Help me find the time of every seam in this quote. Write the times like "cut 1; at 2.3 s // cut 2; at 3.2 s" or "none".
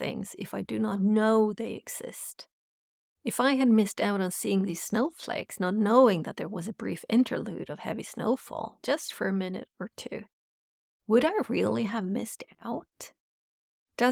none